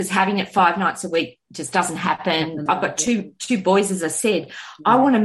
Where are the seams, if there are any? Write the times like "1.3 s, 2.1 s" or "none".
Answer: 2.7 s